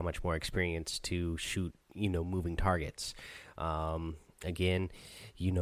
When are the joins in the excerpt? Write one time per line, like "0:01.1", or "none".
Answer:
none